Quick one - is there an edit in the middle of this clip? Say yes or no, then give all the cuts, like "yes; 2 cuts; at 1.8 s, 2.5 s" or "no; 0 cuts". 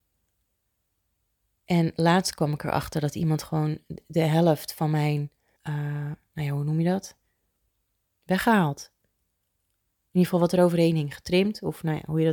yes; 1 cut; at 5.6 s